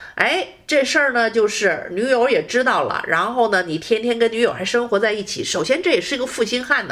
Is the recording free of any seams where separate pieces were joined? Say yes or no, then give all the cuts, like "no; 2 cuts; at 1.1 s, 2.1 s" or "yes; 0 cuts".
yes; 0 cuts